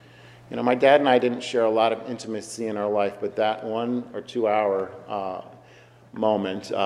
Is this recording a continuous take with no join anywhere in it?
yes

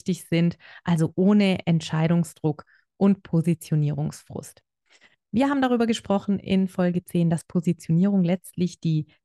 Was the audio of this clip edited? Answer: no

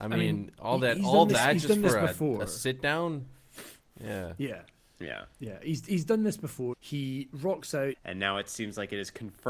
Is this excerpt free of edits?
no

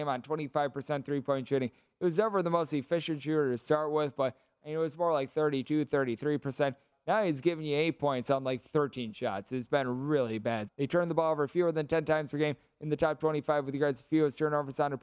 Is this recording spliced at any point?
yes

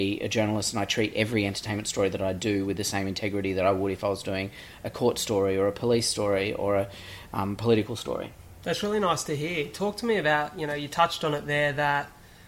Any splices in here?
no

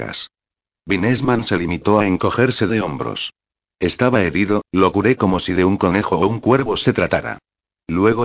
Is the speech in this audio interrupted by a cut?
no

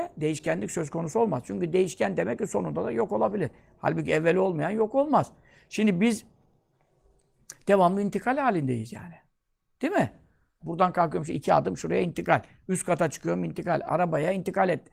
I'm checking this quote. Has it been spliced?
yes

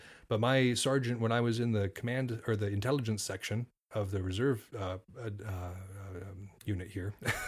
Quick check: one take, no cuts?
yes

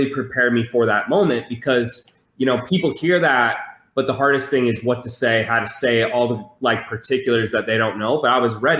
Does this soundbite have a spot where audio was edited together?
no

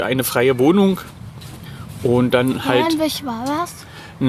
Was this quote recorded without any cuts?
yes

